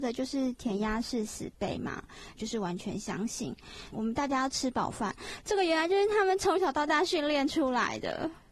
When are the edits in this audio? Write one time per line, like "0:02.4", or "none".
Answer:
0:02.4
0:03.9